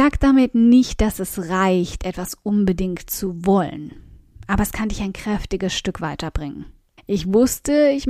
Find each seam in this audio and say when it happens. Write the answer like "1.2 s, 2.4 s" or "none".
7.0 s